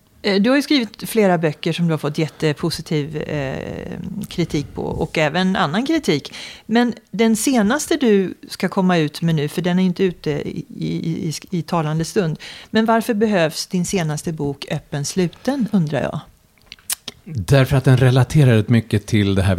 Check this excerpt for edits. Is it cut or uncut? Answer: uncut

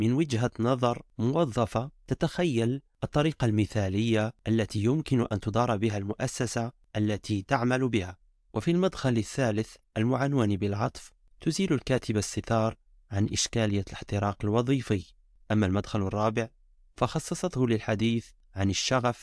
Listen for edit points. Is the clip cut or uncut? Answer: cut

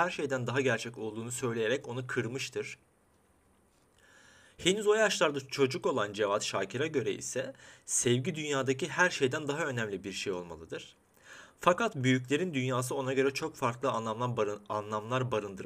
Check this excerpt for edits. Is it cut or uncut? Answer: uncut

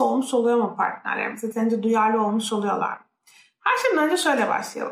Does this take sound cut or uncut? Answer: uncut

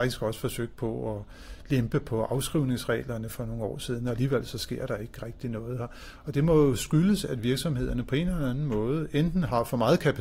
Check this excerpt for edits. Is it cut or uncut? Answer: uncut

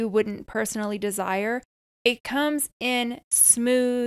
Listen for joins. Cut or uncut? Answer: uncut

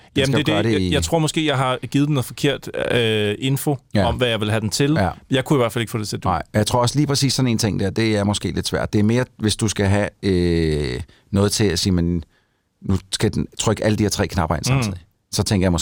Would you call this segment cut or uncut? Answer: uncut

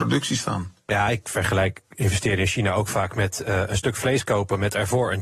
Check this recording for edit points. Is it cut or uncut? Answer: uncut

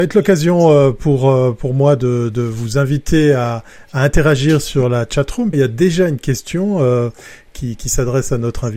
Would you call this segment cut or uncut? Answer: cut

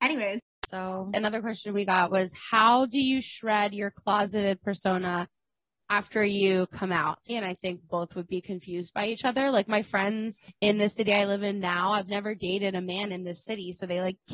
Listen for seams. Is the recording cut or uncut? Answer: cut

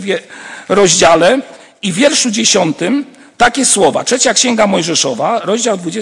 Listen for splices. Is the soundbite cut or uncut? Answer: uncut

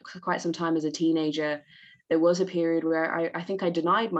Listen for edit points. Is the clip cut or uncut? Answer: uncut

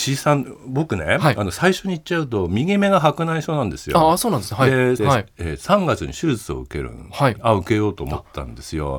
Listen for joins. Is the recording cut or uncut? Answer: cut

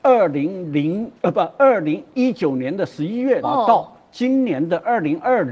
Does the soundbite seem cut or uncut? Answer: cut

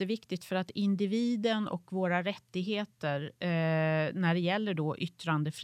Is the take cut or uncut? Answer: uncut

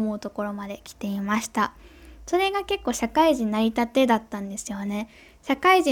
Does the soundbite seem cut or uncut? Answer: uncut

